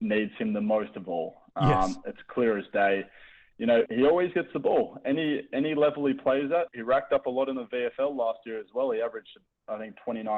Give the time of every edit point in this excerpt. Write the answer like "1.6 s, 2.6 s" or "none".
3.9 s, 6.7 s